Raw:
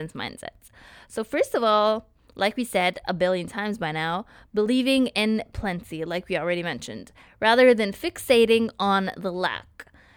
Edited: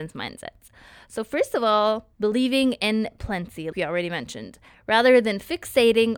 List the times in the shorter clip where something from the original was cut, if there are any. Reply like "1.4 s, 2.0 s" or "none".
2.1 s, 3.7 s